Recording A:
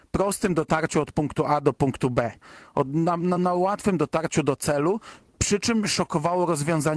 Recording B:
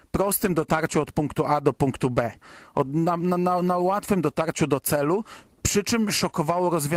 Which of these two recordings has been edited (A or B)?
A